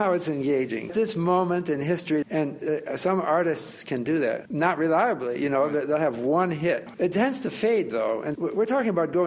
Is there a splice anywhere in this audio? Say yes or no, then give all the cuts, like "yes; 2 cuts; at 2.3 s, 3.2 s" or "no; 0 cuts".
yes; 2 cuts; at 2.2 s, 8.4 s